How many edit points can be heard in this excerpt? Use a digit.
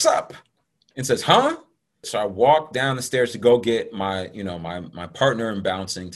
1